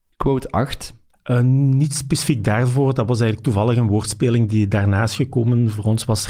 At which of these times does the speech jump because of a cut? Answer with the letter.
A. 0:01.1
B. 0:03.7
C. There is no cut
A